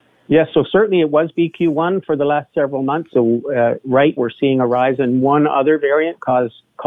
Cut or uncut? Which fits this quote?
cut